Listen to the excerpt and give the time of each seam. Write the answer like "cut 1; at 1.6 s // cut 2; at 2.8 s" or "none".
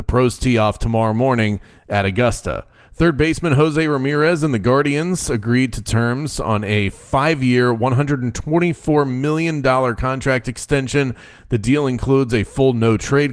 none